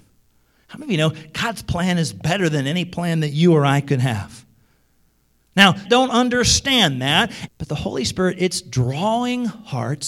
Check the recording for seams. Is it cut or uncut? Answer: cut